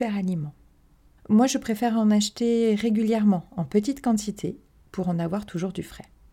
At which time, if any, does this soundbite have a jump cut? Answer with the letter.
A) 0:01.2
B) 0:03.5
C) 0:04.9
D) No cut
A